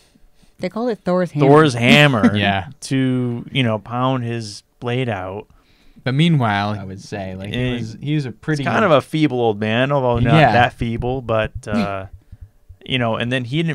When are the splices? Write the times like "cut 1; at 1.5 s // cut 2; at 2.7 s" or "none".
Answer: cut 1; at 6.7 s